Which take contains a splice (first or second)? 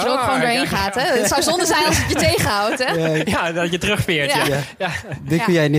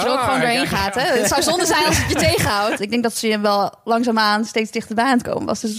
second